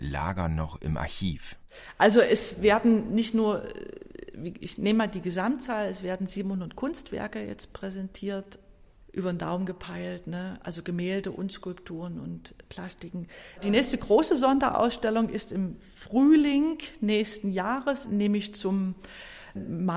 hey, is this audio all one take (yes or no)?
no